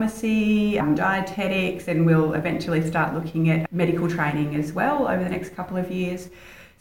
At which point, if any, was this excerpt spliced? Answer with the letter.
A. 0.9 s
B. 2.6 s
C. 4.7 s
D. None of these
A